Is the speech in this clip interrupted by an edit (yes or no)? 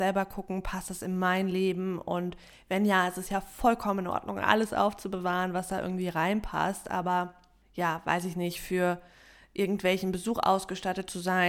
no